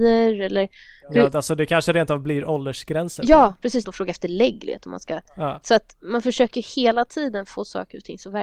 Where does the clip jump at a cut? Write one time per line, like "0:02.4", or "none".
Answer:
0:03.8
0:05.6